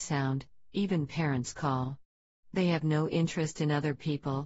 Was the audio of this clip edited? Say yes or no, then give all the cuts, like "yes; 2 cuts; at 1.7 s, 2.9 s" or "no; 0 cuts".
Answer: no; 0 cuts